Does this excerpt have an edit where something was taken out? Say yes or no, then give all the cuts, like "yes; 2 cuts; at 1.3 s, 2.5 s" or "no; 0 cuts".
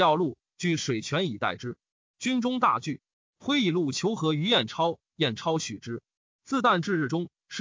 no; 0 cuts